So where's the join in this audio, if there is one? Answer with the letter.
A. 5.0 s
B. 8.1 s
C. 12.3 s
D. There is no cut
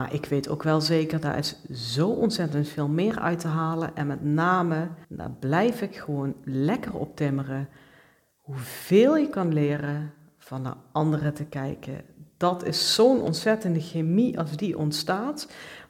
A